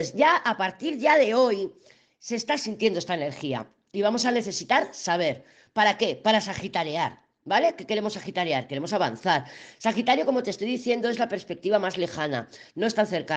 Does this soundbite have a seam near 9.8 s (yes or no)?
no